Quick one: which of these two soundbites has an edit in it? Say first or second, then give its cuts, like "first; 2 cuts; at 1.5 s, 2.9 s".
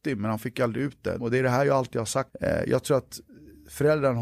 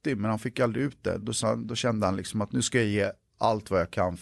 first; 2 cuts; at 1.2 s, 2.3 s